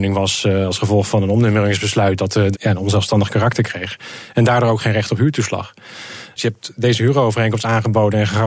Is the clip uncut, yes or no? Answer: no